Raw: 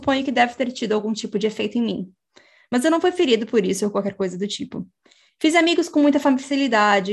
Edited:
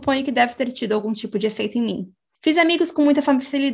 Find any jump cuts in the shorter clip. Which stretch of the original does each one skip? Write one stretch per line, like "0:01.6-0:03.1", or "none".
0:02.4-0:05.3